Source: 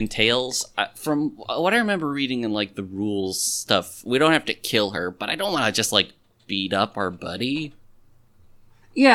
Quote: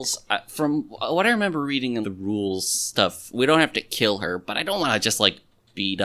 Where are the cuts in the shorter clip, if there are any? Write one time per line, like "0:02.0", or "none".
0:02.0